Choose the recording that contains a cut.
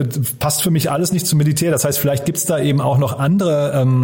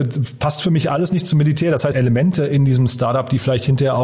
second; 1 cut; at 1.9 s

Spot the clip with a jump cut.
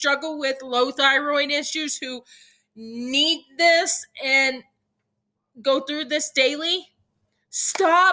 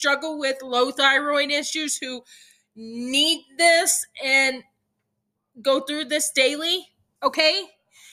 second; 1 cut; at 7.2 s

